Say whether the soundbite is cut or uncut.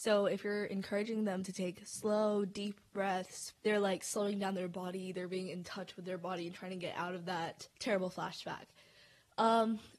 cut